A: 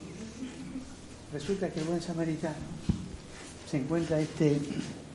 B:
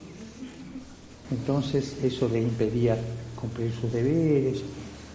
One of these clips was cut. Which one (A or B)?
B